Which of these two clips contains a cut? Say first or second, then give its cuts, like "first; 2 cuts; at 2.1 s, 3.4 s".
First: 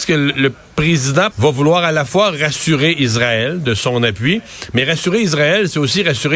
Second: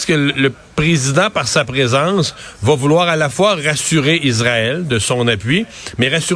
first; 1 cut; at 1.3 s